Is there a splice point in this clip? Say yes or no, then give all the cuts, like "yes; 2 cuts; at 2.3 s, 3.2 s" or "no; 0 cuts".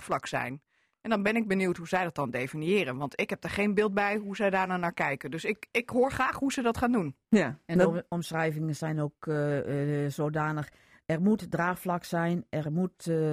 no; 0 cuts